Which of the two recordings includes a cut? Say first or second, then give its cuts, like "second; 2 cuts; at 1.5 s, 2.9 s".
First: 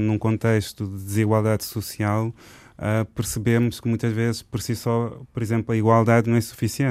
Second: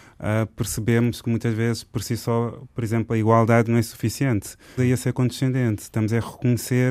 second; 1 cut; at 4.8 s